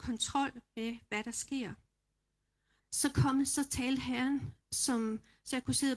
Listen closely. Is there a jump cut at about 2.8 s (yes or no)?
yes